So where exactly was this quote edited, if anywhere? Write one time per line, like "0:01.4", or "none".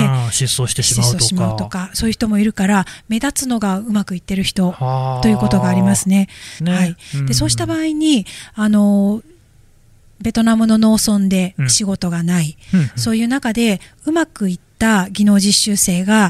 0:06.6